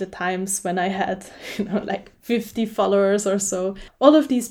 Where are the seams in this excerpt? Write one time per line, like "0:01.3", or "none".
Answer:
none